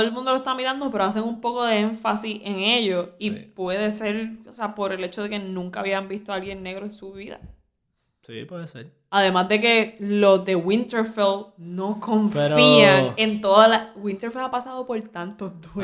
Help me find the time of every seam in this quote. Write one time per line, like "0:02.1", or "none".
none